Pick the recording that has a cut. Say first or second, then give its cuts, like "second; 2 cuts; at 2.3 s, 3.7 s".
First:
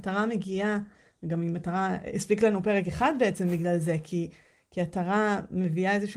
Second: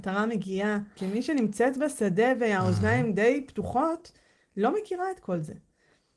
second; 1 cut; at 1.0 s